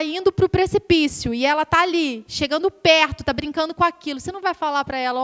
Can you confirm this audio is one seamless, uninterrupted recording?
yes; 0 cuts

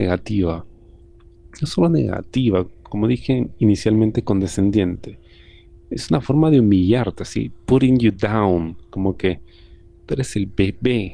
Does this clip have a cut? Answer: no; 0 cuts

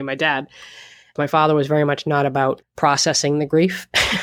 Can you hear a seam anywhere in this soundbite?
yes; 2 cuts; at 1.2 s, 2.6 s

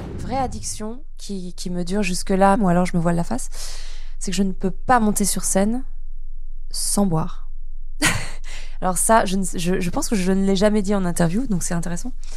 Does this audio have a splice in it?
yes; 1 cut; at 2.6 s

